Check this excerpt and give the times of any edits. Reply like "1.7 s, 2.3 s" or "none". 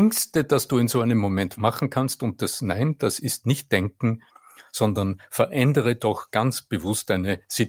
none